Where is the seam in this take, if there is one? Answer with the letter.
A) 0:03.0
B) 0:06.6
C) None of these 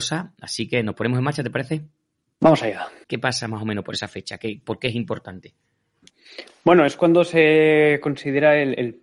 A